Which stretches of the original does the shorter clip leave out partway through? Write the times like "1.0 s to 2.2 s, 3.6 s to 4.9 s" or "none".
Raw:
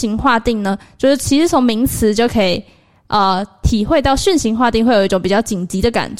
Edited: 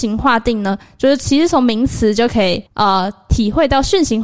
2.7 s to 3.0 s